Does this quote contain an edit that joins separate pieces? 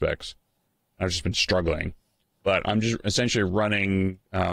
no; 0 cuts

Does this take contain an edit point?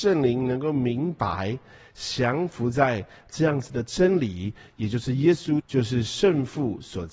yes; 1 cut; at 5.6 s

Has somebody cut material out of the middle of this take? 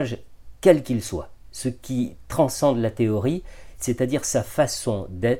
yes; 1 cut; at 3.8 s

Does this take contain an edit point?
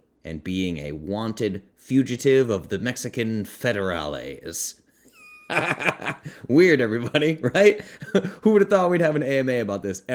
no; 0 cuts

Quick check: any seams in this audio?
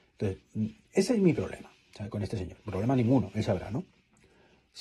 no; 0 cuts

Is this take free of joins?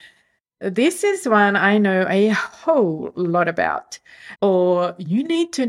no; 1 cut; at 4.4 s

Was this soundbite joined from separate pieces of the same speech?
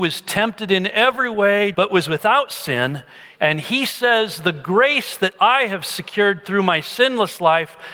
yes; 2 cuts; at 1.7 s, 3.4 s

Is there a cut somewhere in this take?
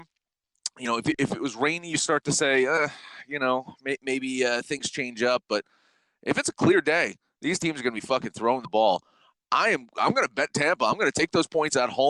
no; 0 cuts

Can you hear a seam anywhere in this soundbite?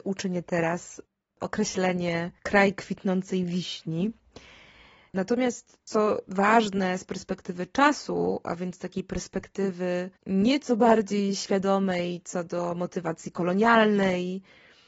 yes; 2 cuts; at 5.1 s, 10.2 s

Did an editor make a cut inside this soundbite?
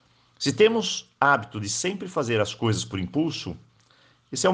no; 0 cuts

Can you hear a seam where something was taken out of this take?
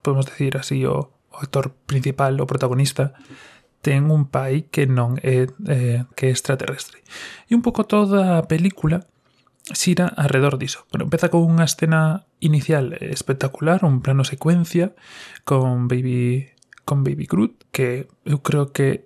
yes; 2 cuts; at 6.1 s, 17.6 s

